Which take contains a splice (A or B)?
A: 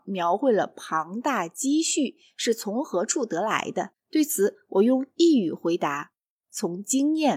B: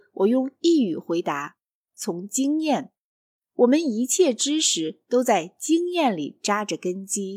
A